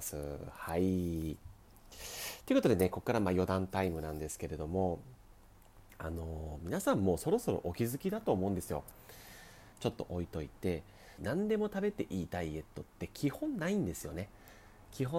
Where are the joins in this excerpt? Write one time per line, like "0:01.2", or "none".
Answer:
0:09.7
0:11.2